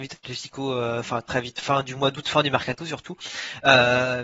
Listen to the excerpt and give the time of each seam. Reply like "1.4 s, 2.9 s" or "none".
1.0 s